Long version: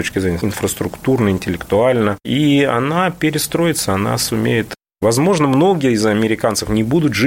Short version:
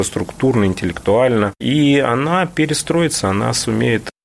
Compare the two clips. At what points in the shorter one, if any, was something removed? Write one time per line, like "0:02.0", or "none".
none